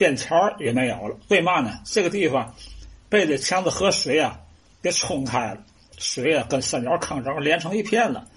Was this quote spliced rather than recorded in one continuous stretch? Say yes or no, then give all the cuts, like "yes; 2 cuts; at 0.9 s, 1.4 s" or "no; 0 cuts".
no; 0 cuts